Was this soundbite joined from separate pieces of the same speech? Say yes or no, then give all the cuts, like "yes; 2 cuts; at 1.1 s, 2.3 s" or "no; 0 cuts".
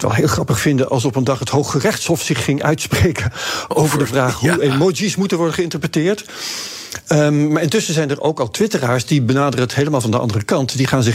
no; 0 cuts